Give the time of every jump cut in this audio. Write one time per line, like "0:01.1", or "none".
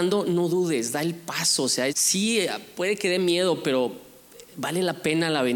0:01.9